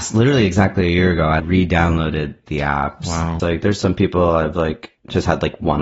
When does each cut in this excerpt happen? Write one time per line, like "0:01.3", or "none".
0:01.4
0:03.4